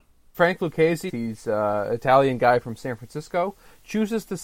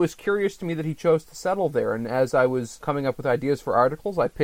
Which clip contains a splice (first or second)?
first